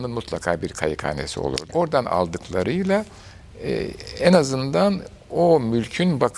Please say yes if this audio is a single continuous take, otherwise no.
no